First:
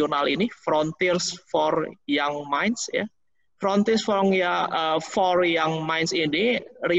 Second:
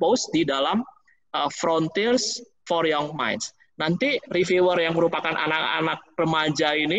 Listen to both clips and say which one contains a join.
second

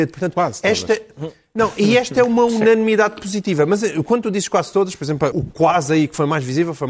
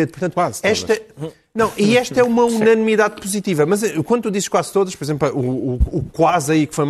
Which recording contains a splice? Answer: first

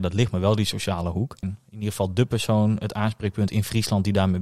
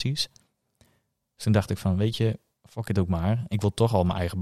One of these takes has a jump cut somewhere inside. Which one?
first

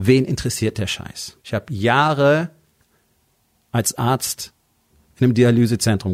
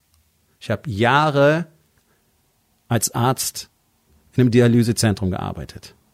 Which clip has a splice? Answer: first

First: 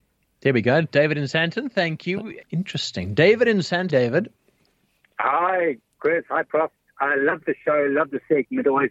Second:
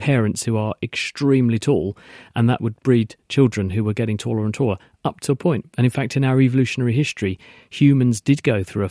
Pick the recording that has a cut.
first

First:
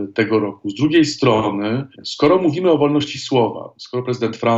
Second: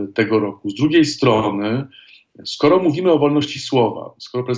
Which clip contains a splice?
first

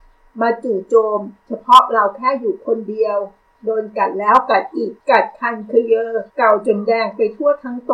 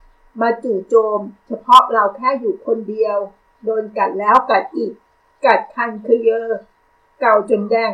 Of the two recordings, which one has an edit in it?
first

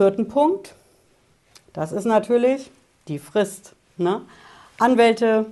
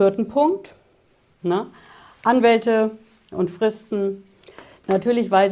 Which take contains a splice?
second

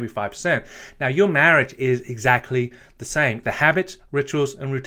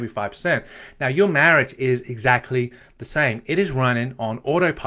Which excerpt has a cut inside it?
first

